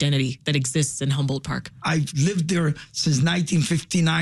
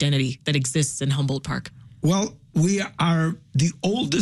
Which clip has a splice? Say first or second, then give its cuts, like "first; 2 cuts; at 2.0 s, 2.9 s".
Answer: first; 1 cut; at 1.8 s